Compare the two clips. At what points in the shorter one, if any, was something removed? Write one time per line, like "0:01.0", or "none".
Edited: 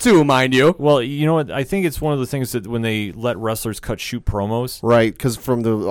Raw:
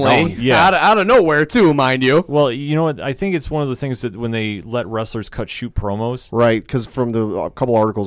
none